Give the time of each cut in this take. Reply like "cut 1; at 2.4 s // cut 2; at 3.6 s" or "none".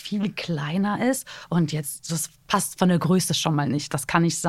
none